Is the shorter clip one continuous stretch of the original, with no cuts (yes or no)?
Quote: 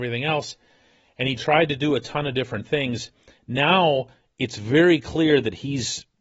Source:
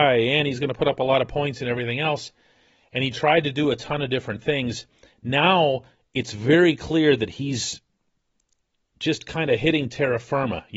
yes